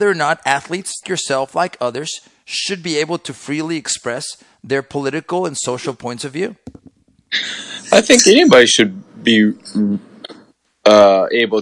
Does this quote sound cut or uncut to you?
cut